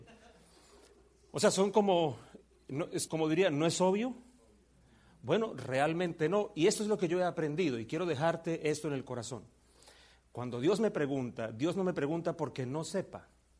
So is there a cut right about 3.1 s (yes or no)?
yes